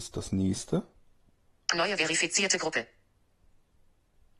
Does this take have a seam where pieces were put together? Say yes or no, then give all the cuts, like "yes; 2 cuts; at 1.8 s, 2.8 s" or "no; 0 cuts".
no; 0 cuts